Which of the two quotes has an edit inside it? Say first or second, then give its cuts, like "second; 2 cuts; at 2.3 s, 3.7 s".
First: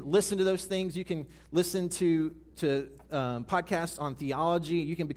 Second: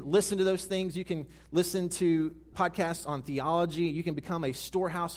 second; 1 cut; at 2.5 s